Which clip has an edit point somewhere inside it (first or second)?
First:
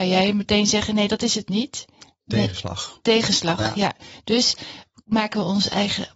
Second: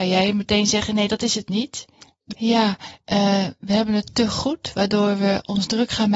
second